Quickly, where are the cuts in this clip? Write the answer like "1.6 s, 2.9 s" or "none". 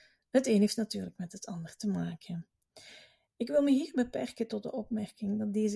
none